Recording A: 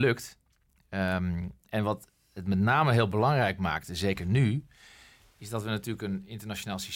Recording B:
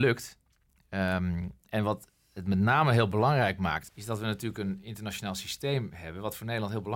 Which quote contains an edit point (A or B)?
B